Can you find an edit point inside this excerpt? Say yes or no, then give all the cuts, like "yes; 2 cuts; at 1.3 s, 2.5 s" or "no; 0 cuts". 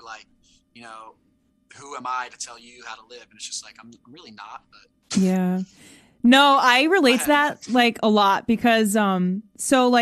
no; 0 cuts